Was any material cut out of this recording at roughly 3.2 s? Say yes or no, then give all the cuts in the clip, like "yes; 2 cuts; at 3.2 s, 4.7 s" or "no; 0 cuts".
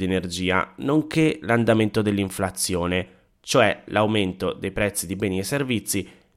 no; 0 cuts